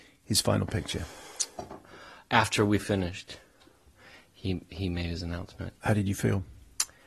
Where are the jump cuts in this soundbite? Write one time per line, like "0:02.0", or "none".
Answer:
none